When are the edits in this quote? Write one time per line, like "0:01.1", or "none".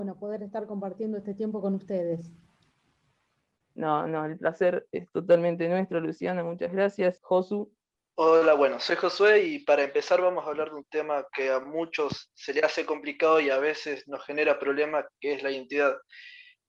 0:07.2